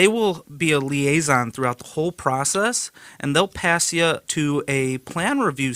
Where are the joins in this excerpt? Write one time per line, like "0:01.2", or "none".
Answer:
0:04.2